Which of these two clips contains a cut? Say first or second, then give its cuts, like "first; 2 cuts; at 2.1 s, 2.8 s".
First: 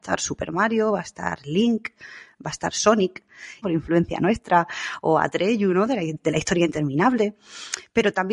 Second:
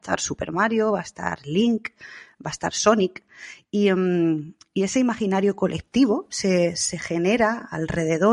first; 1 cut; at 3.6 s